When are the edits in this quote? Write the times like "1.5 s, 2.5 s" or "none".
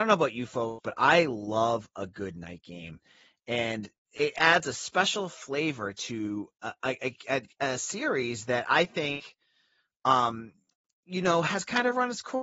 none